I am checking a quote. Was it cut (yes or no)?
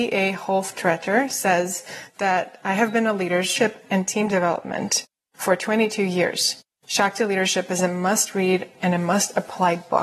no